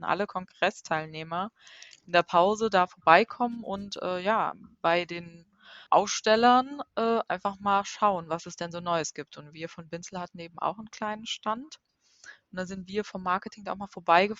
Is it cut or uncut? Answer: cut